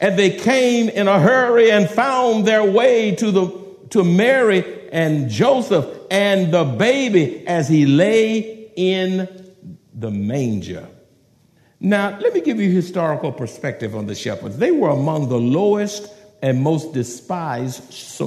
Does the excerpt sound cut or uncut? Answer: uncut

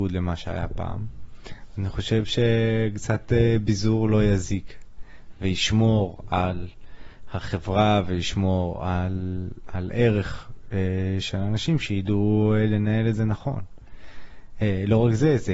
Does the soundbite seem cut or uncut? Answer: uncut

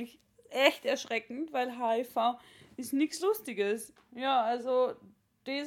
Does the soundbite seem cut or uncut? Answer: cut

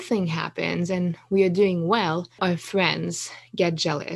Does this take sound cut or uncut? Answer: cut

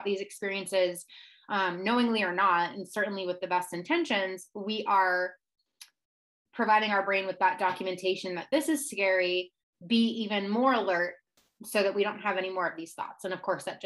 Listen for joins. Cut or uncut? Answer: cut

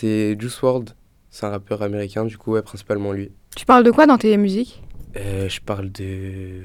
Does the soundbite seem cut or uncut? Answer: uncut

